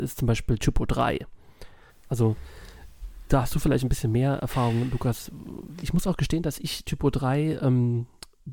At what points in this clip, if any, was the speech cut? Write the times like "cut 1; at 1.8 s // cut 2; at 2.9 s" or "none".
cut 1; at 1.9 s // cut 2; at 5.8 s